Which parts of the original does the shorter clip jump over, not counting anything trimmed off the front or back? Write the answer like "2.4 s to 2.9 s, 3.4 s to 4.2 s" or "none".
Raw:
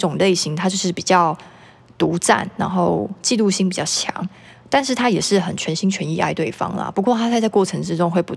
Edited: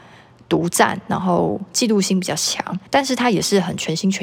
4.4 s to 4.7 s